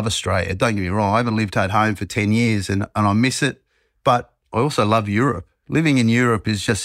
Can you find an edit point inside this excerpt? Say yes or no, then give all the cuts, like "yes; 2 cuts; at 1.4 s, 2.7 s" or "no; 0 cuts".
yes; 1 cut; at 4.4 s